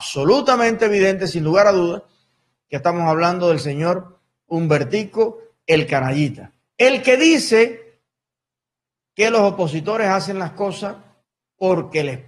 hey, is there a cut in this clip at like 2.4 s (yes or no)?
no